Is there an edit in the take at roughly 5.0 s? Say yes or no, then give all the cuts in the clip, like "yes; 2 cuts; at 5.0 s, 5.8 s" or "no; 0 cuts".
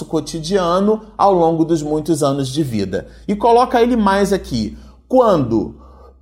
no; 0 cuts